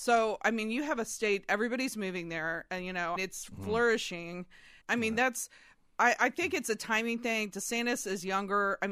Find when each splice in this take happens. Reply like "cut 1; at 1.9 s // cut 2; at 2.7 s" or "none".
cut 1; at 3.2 s // cut 2; at 4.8 s